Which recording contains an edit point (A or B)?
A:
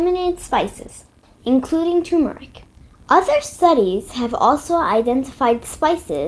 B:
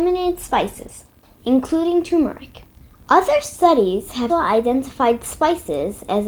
B